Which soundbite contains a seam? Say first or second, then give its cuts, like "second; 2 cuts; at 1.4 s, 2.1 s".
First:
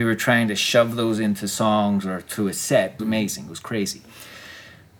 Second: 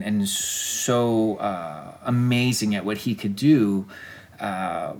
first; 1 cut; at 3.0 s